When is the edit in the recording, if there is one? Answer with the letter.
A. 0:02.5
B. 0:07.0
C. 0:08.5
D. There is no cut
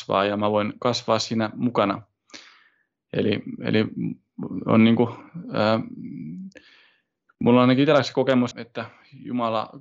C